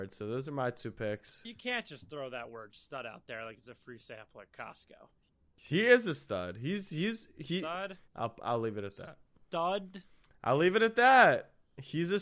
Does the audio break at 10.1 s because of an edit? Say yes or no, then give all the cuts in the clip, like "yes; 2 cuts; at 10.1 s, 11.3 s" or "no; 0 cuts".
no; 2 cuts; at 1.4 s, 8.1 s